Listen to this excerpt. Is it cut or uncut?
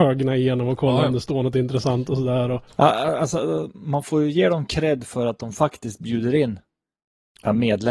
uncut